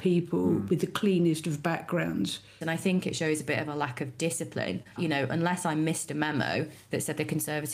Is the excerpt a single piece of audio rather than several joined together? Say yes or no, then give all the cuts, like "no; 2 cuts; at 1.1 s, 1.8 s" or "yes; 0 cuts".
no; 2 cuts; at 2.6 s, 5.0 s